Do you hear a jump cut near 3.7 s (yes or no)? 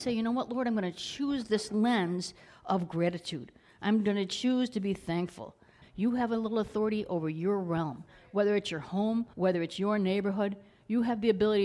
no